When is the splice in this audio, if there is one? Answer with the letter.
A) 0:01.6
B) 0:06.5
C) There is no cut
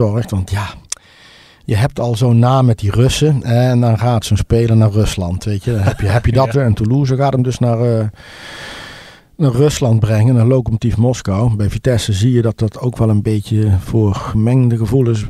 B